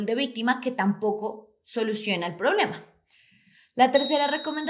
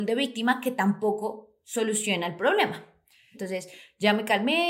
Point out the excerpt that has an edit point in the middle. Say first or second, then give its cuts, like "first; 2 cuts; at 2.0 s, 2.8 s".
second; 1 cut; at 3.3 s